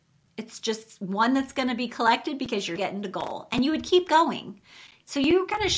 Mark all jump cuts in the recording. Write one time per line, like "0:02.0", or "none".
0:02.8

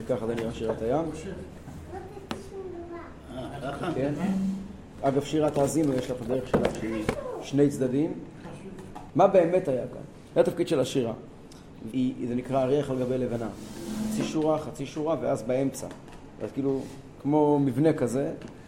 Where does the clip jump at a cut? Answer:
0:09.1
0:11.9

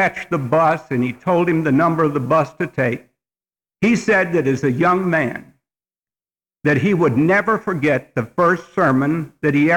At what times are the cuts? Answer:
0:03.7

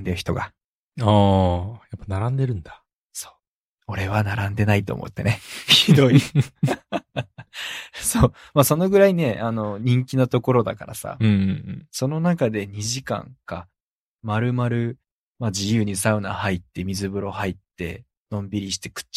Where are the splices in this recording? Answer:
none

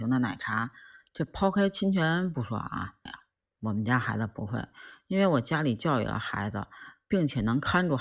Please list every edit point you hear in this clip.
0:03.1

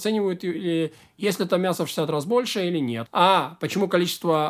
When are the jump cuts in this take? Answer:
0:03.1

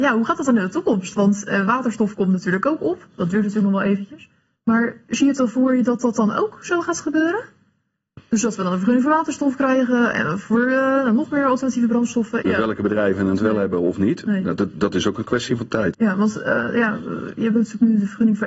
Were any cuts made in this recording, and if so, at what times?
0:12.4
0:15.9

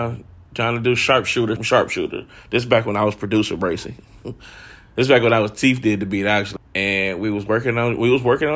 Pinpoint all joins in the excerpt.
0:01.6
0:06.6

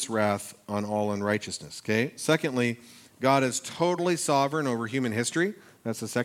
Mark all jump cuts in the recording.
none

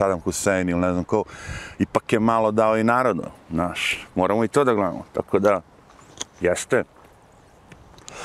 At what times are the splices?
none

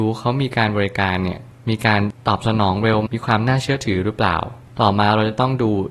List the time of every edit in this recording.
0:03.1

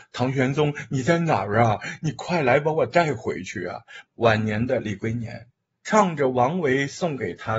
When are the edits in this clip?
0:04.1
0:05.8

